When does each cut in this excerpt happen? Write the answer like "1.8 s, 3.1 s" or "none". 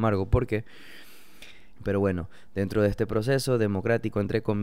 1.8 s